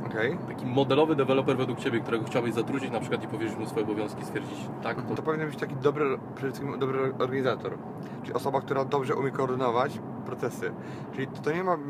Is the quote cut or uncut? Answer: cut